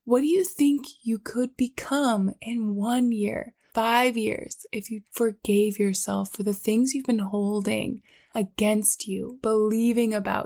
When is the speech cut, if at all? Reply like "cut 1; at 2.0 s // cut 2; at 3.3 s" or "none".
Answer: cut 1; at 3.7 s // cut 2; at 5.0 s